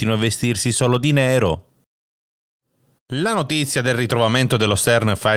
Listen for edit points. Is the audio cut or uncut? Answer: uncut